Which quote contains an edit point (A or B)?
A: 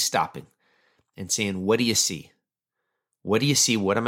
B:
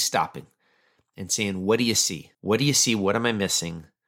B